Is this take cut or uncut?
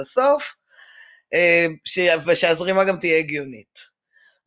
uncut